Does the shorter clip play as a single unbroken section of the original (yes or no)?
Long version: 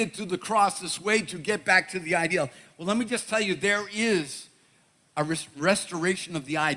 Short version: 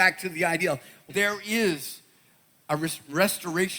no